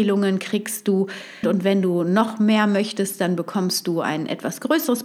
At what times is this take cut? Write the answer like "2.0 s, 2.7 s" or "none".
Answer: 1.4 s